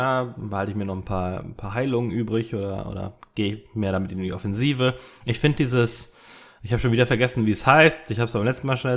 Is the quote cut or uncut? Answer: uncut